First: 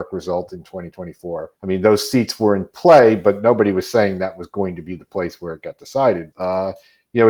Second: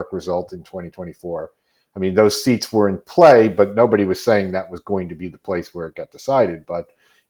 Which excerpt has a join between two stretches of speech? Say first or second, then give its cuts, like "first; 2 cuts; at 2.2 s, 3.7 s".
first; 2 cuts; at 1.5 s, 6.3 s